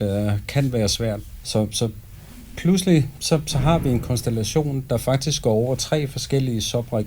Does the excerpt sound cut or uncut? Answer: cut